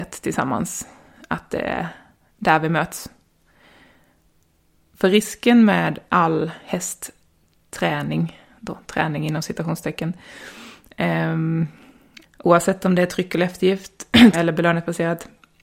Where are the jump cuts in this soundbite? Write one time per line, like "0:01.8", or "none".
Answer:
0:12.2
0:14.3